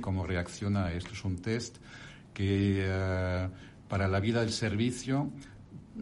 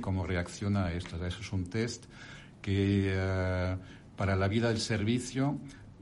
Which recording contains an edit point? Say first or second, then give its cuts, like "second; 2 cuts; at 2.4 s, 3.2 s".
first; 1 cut; at 1.1 s